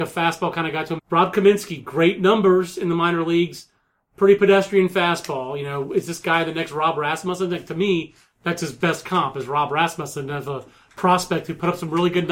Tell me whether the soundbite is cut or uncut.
cut